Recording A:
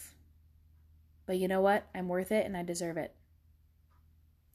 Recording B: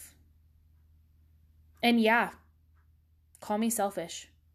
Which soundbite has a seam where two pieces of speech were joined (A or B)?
A